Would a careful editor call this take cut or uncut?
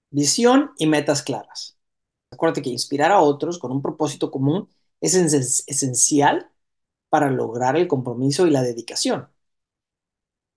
cut